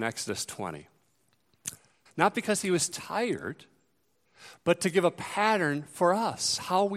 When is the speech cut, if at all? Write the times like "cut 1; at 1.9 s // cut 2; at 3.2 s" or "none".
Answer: cut 1; at 2.1 s